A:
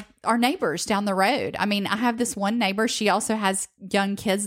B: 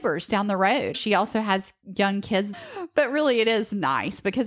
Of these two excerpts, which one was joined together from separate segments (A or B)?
B